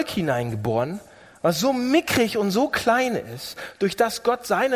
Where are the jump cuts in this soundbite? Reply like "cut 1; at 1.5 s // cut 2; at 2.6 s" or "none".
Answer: none